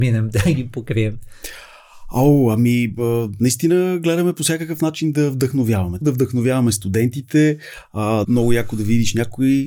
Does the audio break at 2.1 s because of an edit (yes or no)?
no